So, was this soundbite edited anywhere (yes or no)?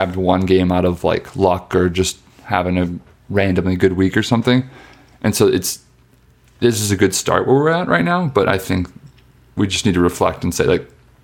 no